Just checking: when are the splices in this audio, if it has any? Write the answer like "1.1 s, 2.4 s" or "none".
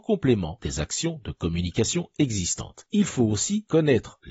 none